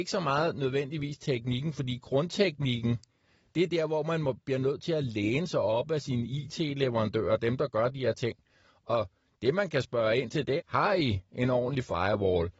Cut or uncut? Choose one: cut